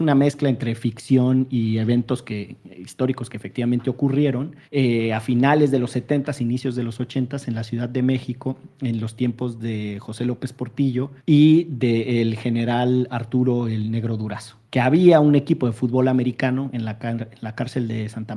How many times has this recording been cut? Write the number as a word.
three